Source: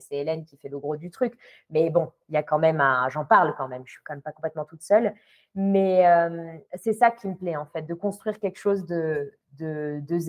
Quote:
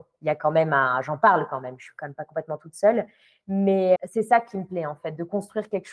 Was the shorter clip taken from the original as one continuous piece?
no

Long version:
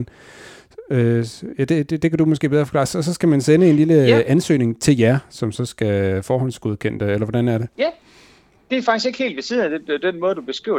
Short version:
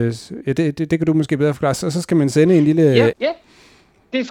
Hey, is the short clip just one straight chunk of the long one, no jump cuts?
no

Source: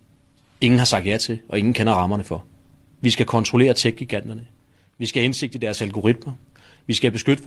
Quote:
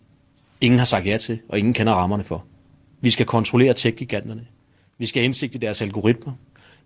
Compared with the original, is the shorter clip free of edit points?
yes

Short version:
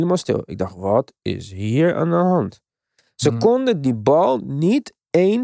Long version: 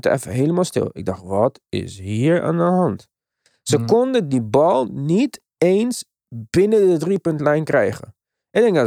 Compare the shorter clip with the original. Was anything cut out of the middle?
no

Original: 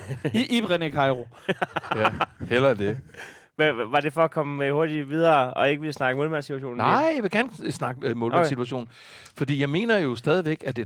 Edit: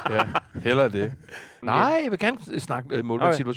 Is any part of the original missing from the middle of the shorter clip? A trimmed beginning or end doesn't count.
yes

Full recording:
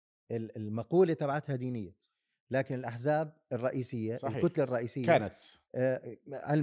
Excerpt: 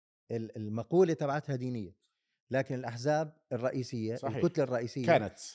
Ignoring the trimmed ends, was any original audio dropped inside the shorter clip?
no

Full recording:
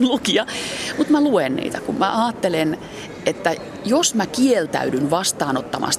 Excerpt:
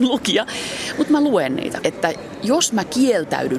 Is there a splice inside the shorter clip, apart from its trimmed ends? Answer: yes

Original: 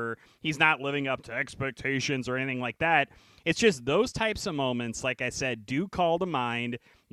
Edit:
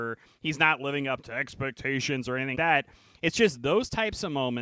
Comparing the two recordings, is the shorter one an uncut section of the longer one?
no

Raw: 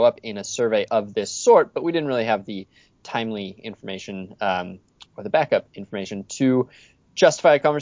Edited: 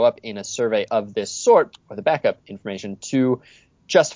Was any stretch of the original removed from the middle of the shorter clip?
yes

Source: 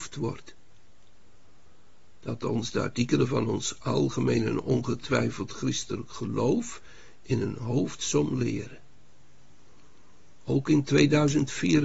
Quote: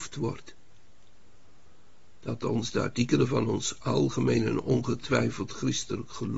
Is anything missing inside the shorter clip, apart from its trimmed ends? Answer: no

